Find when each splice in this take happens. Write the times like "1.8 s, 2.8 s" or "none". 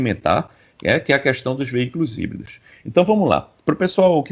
none